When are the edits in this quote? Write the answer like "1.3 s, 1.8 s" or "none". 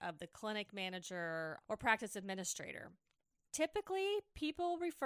1.6 s